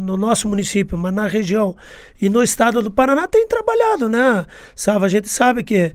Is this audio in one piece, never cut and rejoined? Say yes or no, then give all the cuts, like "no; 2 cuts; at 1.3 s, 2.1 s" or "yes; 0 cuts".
yes; 0 cuts